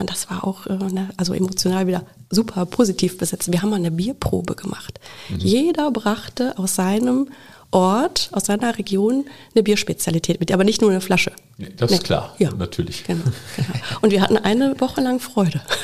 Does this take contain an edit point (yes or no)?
no